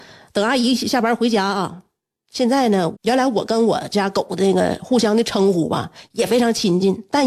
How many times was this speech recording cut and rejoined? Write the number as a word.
one